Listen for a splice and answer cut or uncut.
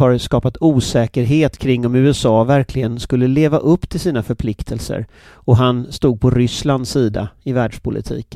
uncut